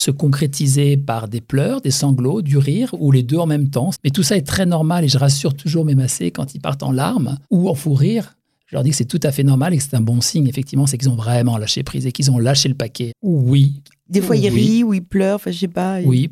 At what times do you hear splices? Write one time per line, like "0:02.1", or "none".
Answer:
0:03.9
0:07.4
0:13.1